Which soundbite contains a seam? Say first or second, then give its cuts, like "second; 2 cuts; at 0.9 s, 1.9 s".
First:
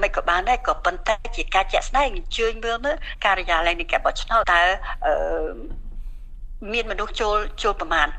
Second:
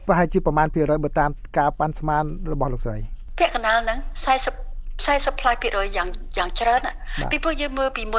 first; 1 cut; at 4.4 s